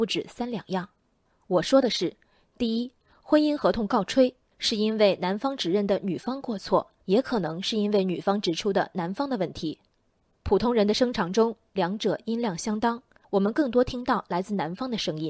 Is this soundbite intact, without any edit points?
no; 3 cuts; at 1.3 s, 7.0 s, 13.2 s

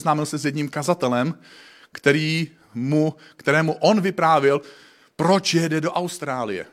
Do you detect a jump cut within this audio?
no; 0 cuts

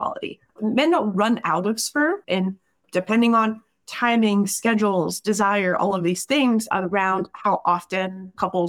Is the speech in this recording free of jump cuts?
no; 1 cut; at 2.2 s

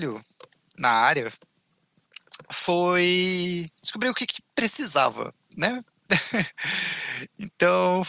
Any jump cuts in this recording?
no; 0 cuts

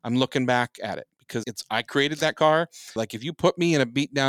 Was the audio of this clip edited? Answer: yes; 2 cuts; at 1.4 s, 3.0 s

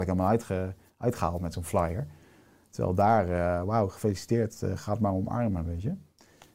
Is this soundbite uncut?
yes; 0 cuts

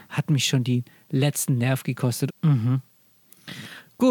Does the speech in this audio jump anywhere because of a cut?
yes; 1 cut; at 2.3 s

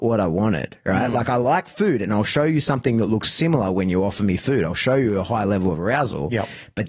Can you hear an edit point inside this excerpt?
no; 0 cuts

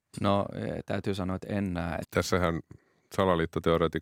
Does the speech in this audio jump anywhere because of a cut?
yes; 1 cut; at 2.0 s

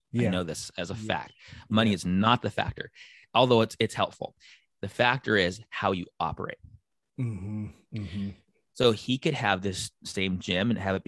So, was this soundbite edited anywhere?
no; 0 cuts

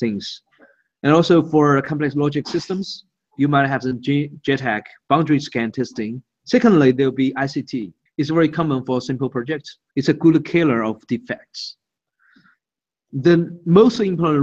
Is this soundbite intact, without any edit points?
no; 3 cuts; at 6.4 s, 8.1 s, 9.9 s

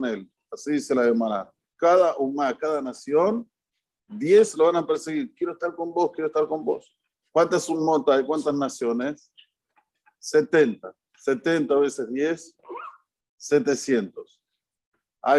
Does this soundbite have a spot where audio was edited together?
no; 0 cuts

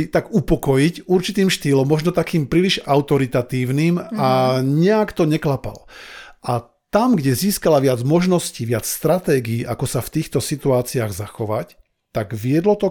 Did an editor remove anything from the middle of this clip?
no; 0 cuts

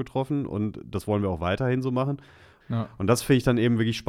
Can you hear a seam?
yes; 1 cut; at 2.6 s

